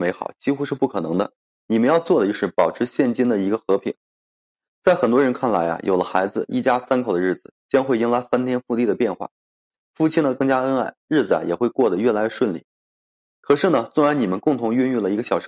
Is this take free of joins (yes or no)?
yes